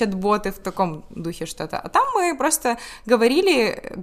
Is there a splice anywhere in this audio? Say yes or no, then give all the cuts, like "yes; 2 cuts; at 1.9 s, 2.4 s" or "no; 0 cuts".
no; 0 cuts